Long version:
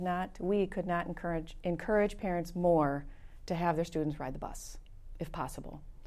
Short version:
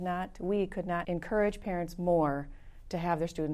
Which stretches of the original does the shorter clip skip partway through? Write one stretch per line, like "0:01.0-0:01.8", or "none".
0:01.0-0:01.6